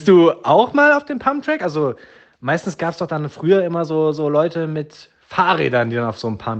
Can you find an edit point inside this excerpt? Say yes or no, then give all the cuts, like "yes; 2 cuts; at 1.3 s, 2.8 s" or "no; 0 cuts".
no; 0 cuts